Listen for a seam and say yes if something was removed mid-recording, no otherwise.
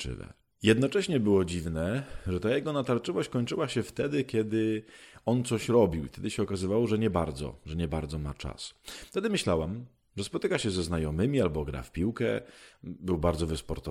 no